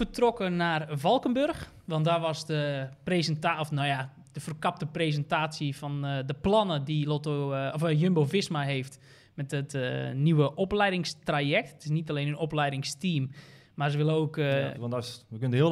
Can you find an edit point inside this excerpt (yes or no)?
yes